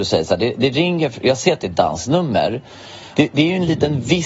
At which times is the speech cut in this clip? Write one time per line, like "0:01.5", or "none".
0:03.1